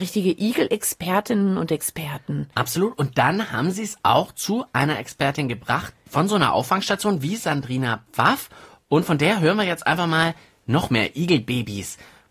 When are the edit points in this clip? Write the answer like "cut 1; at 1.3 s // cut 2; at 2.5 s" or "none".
none

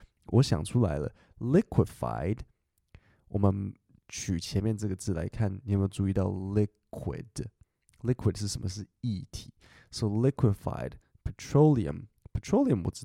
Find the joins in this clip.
none

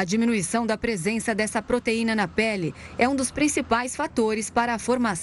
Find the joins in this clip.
none

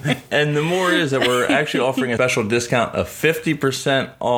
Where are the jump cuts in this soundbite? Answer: none

